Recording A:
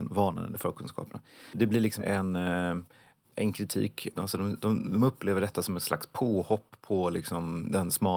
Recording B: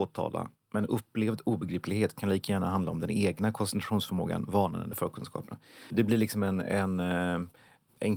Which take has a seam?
A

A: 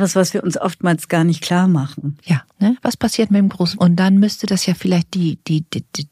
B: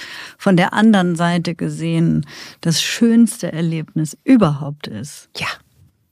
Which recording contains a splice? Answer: A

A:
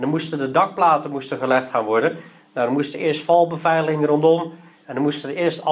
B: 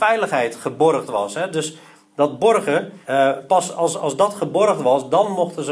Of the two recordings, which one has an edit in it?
B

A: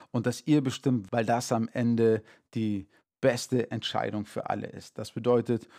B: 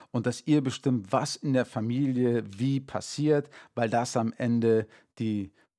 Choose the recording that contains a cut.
A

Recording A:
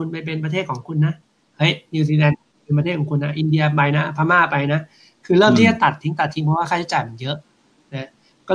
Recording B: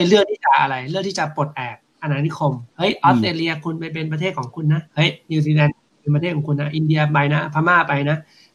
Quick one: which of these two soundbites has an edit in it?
B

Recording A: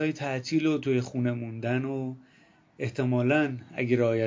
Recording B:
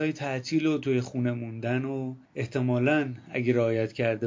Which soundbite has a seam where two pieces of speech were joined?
B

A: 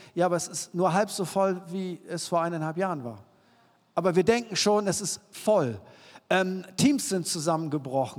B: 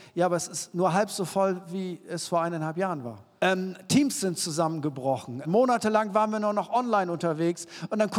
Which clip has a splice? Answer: B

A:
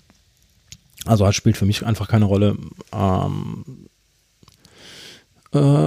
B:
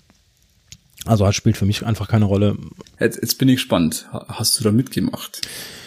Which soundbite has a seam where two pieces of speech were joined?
B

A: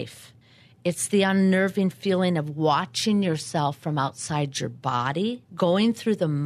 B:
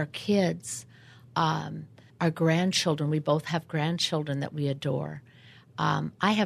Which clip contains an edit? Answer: A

